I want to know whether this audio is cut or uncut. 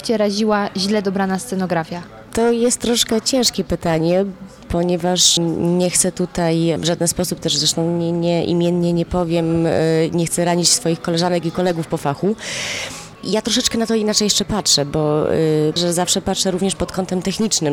cut